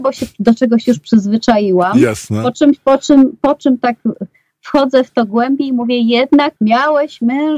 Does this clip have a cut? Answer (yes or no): yes